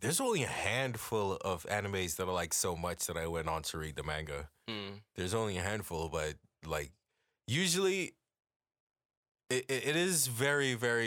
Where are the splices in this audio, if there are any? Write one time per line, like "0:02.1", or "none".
none